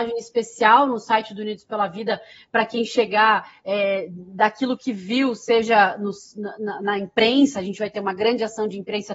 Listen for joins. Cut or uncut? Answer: uncut